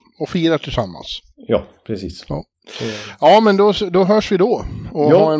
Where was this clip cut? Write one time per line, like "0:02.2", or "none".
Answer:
none